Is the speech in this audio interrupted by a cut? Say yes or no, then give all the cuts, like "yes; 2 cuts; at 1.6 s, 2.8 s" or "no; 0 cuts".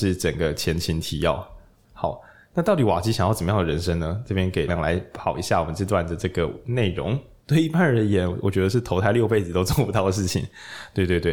yes; 2 cuts; at 4.7 s, 7.4 s